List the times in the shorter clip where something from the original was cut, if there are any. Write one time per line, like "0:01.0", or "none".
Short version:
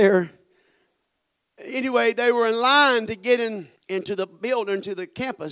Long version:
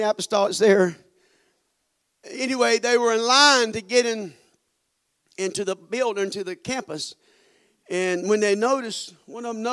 0:03.8

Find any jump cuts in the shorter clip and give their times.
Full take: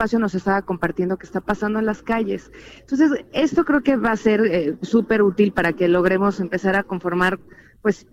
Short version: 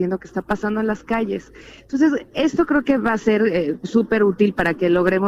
none

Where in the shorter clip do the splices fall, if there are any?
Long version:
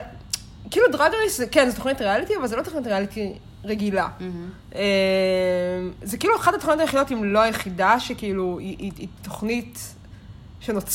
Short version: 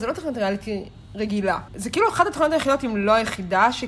0:01.7

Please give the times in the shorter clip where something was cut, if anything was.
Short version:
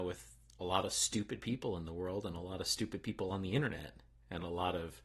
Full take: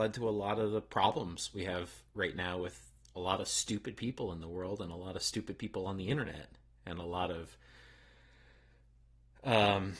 none

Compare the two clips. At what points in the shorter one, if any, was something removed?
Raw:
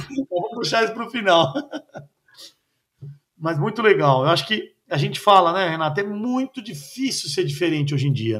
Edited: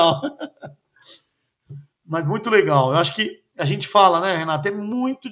none

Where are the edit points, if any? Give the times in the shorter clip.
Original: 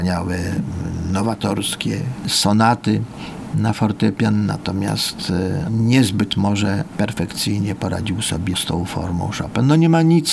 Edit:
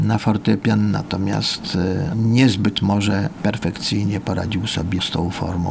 none

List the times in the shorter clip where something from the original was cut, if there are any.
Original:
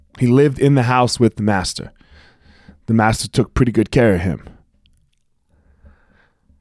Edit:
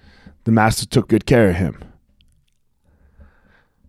0:01.1

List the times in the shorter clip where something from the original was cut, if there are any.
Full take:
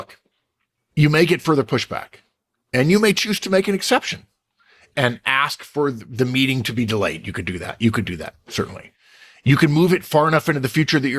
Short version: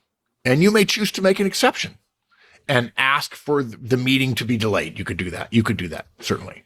none

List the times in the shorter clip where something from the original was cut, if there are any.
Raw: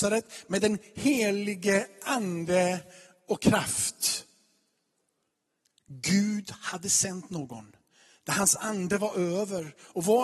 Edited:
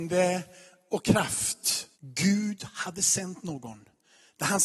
0:01.9

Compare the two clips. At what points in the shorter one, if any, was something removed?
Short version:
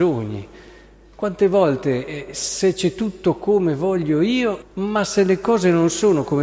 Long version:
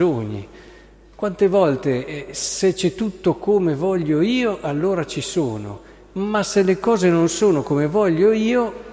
0:04.6

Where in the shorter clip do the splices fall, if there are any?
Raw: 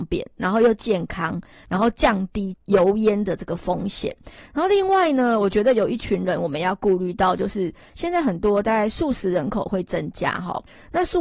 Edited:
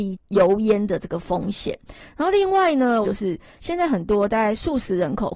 0:03.0

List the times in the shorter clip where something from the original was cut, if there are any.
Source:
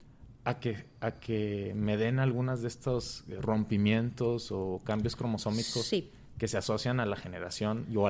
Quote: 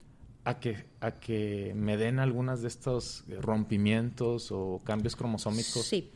none

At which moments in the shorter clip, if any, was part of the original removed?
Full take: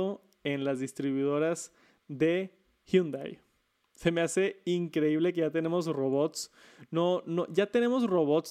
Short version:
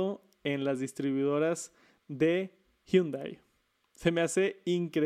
none

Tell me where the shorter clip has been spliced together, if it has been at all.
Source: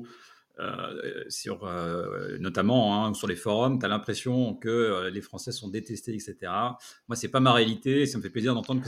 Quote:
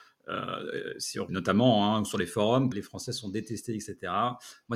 0:01.3
0:02.7

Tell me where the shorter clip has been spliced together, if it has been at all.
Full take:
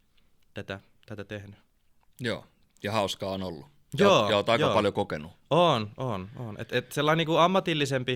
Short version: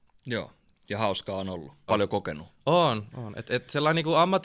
0:01.9
0:03.1

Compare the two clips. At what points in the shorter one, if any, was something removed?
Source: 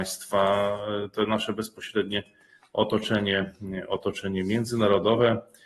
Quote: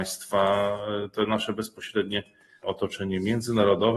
0:02.6

